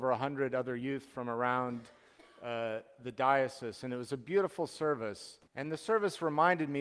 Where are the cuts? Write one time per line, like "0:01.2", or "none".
0:05.5